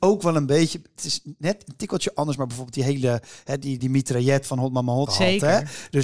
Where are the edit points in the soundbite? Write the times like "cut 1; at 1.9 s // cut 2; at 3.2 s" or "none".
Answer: cut 1; at 3.8 s // cut 2; at 5.1 s